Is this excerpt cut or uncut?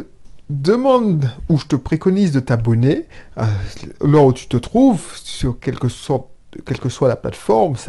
uncut